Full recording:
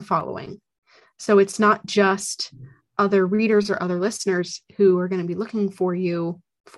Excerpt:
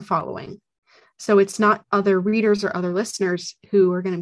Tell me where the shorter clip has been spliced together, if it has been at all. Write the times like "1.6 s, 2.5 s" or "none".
1.8 s